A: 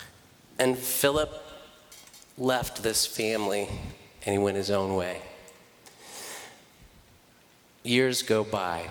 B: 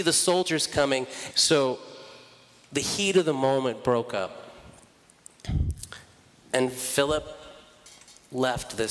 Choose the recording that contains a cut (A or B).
B